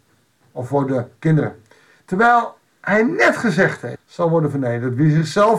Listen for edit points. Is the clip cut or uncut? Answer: cut